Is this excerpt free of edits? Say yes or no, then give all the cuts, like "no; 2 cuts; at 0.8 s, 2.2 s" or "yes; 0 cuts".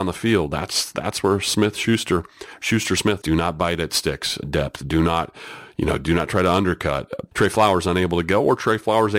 no; 3 cuts; at 3.2 s, 4.4 s, 7.3 s